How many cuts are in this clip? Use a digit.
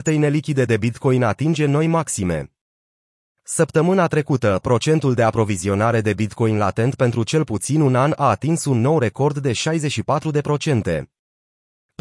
0